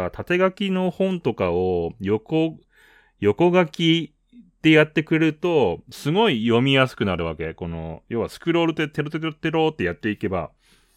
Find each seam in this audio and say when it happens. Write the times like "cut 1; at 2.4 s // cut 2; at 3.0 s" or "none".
none